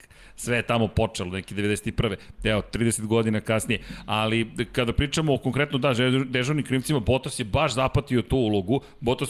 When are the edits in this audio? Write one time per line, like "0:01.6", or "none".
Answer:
none